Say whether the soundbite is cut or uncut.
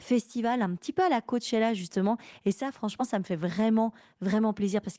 uncut